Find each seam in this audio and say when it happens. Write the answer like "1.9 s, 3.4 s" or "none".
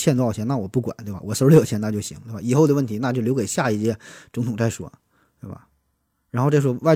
none